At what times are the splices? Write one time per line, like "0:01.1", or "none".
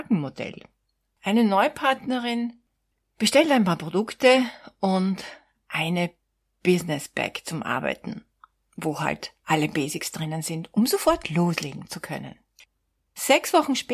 0:01.2